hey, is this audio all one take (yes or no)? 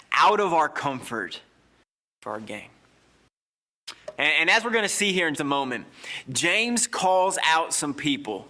no